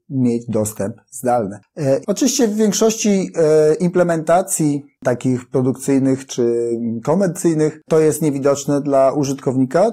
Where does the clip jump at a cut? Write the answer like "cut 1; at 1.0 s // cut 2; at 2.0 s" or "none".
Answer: cut 1; at 2.0 s // cut 2; at 4.9 s